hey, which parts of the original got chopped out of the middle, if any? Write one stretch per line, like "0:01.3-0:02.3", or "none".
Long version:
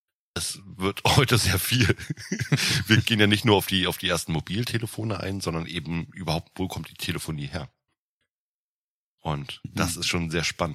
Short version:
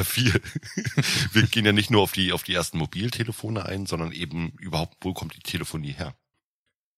none